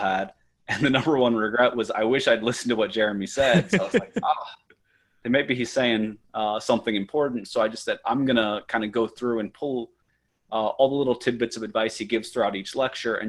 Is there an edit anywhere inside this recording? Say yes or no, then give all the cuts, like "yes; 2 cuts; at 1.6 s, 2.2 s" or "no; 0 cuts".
no; 0 cuts